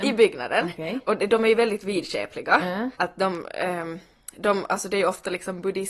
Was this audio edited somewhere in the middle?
yes; 1 cut; at 2.9 s

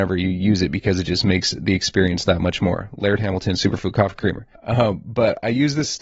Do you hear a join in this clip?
yes; 1 cut; at 4.6 s

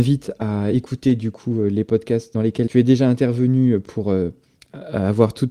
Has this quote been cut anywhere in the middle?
no; 0 cuts

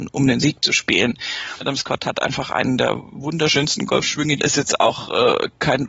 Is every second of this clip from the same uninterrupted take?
no; 2 cuts; at 1.6 s, 4.4 s

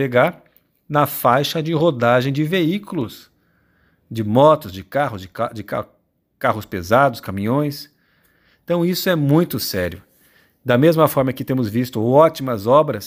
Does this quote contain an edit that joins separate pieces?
no; 0 cuts

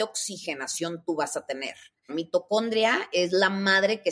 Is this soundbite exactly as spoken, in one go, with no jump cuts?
no; 1 cut; at 2.1 s

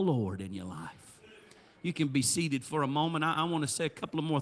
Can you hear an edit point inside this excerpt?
no; 0 cuts

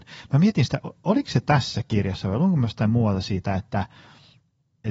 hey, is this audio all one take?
yes; 0 cuts

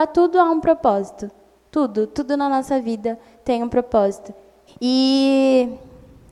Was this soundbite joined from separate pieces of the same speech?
yes; 1 cut; at 4.7 s

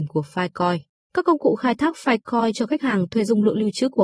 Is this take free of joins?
no; 1 cut; at 1.0 s

